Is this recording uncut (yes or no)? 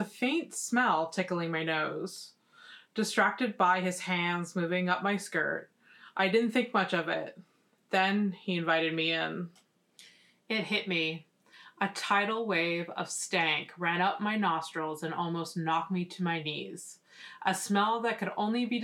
yes